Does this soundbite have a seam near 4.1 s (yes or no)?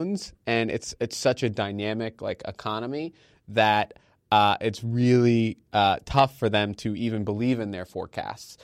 no